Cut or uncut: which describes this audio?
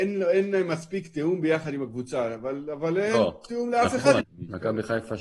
cut